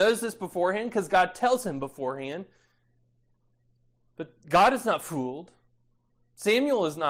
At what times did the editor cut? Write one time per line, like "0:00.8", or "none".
none